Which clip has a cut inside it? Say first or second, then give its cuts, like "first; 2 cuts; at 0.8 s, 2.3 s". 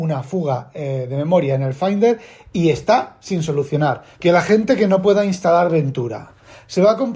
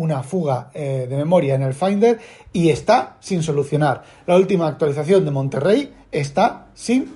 first; 1 cut; at 4.1 s